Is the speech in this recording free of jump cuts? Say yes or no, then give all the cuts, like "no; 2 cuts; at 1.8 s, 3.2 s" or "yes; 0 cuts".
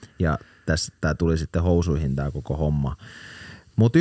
yes; 0 cuts